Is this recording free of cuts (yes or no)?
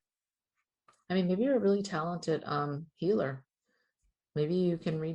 yes